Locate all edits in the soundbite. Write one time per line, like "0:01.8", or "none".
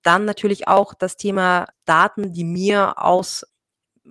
none